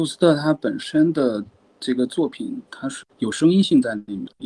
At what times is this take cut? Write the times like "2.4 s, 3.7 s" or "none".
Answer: 3.0 s